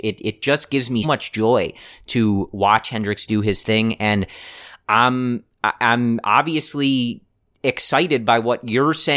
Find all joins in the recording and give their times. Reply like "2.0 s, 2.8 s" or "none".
1.0 s